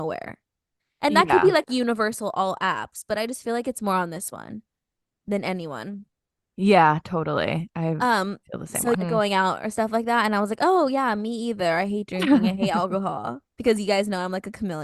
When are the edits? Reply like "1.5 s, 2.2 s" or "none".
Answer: 8.9 s